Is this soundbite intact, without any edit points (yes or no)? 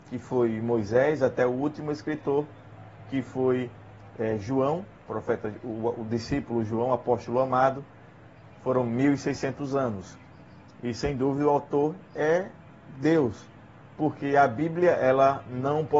yes